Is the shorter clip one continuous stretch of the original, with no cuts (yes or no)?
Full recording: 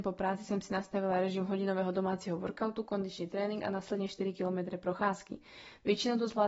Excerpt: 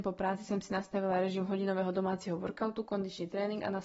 yes